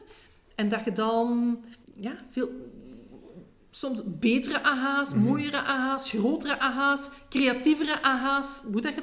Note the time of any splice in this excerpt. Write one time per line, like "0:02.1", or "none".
0:01.8